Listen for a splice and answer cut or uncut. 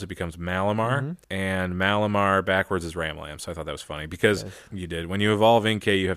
cut